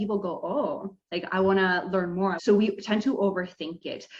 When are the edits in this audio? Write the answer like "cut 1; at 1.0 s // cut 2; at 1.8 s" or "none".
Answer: cut 1; at 2.4 s